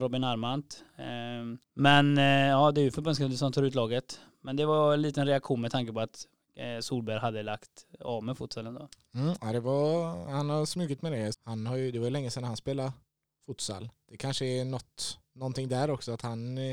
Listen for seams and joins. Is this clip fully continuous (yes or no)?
no